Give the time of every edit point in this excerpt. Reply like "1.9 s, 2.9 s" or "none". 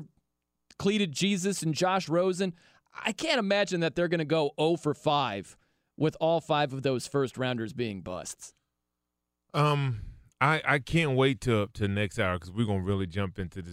none